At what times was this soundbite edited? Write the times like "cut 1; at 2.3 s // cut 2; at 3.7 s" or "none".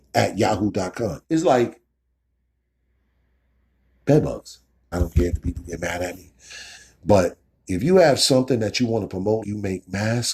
cut 1; at 1.2 s // cut 2; at 4.9 s // cut 3; at 9.4 s